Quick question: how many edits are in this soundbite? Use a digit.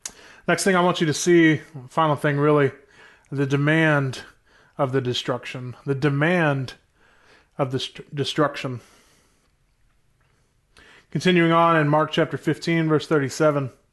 0